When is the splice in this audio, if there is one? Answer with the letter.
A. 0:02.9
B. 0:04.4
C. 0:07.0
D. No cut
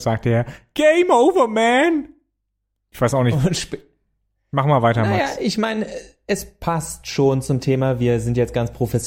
A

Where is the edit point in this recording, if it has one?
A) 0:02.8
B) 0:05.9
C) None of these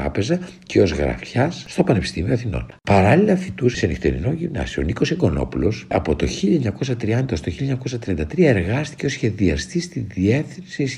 B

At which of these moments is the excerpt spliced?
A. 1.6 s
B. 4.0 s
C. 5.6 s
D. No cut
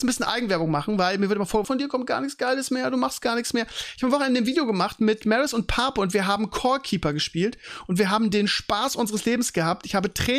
A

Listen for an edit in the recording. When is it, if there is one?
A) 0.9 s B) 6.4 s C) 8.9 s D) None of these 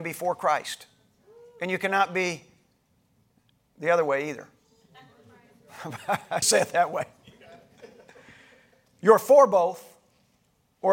B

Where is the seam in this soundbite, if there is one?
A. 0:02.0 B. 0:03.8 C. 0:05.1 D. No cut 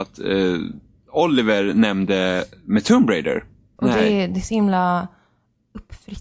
B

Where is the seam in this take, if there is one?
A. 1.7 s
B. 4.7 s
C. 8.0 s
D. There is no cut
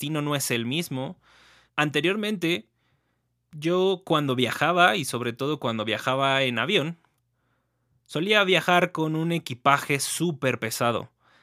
A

